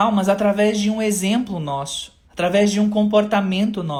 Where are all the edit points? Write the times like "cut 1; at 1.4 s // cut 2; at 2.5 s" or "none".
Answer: cut 1; at 2.2 s